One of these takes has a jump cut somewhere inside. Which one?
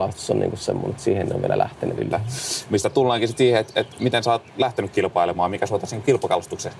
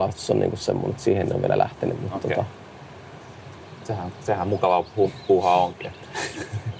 first; 1 cut; at 2.0 s

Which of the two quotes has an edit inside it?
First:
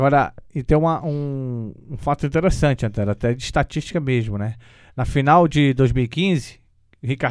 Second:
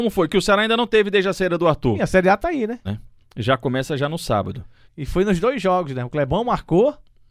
second; 2 cuts; at 2.8 s, 4.8 s

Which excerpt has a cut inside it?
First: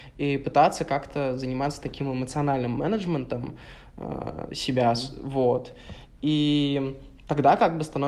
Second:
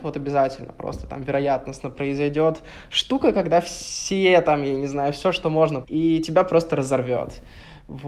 second; 1 cut; at 5.8 s

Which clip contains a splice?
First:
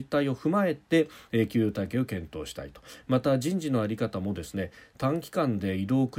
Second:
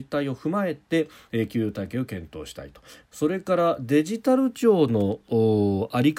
second; 1 cut; at 3.0 s

